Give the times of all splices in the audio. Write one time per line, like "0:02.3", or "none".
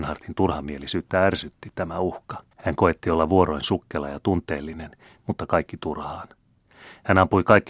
0:02.5
0:05.2